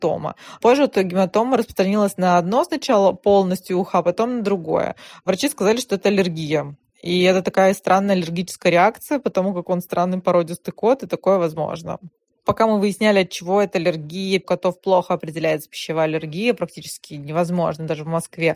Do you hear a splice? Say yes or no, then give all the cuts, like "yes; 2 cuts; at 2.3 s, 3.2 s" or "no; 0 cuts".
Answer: no; 0 cuts